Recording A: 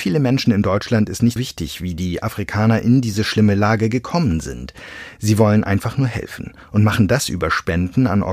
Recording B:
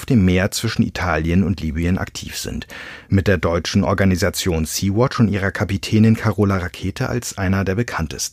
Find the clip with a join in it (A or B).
A